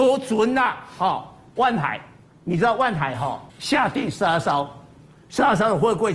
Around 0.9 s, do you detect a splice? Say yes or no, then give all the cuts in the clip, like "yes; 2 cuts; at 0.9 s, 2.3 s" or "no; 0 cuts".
no; 1 cut; at 3.5 s